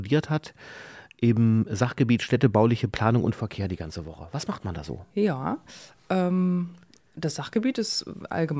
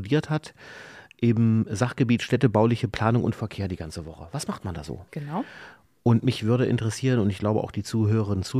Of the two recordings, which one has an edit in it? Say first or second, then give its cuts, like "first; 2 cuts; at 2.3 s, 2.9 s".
second; 1 cut; at 5.1 s